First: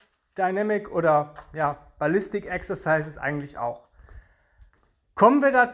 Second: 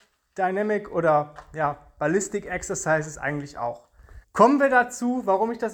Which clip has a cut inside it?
second; 1 cut; at 4.2 s

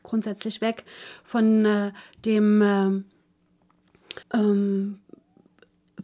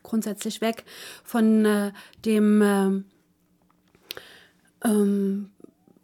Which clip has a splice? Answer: first; 1 cut; at 4.2 s

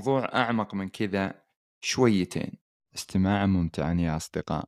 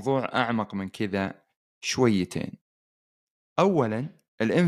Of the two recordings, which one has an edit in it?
first; 1 cut; at 2.8 s

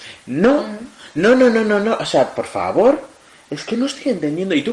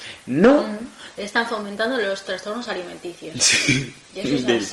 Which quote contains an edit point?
second; 1 cut; at 1.1 s

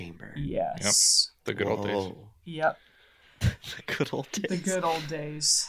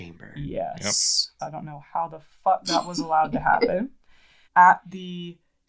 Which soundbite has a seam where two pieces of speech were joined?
second; 2 cuts; at 1.4 s, 4.4 s

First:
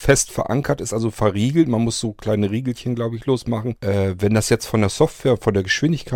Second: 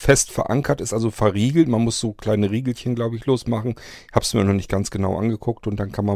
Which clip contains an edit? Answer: first; 1 cut; at 3.7 s

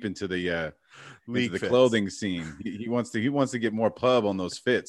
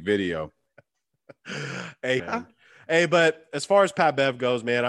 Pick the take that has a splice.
second; 1 cut; at 2.2 s

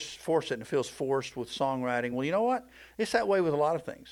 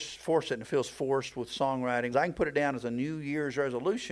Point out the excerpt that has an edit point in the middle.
second; 1 cut; at 2.1 s

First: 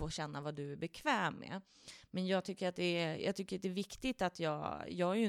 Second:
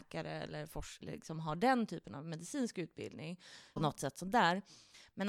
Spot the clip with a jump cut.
second; 2 cuts; at 1.0 s, 3.8 s

